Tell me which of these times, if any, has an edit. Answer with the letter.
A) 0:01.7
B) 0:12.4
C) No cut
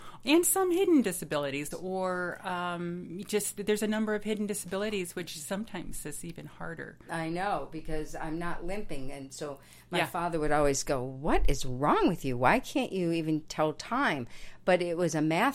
A